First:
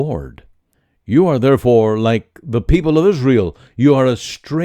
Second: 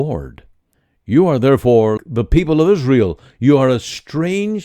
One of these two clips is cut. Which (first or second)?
second